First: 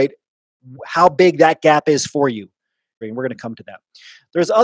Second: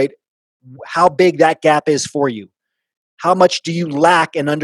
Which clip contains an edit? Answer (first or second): first